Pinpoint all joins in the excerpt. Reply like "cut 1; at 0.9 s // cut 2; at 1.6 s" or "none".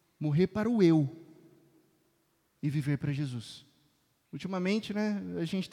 cut 1; at 4.2 s